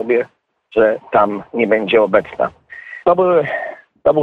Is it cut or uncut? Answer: cut